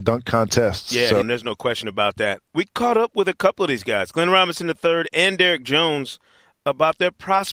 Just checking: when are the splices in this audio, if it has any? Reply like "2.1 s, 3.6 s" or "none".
1.2 s